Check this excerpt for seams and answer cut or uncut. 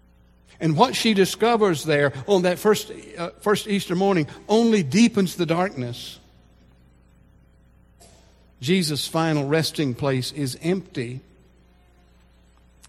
uncut